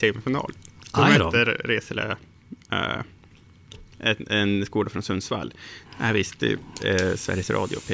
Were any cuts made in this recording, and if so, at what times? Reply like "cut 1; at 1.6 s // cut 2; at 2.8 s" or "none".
cut 1; at 5.9 s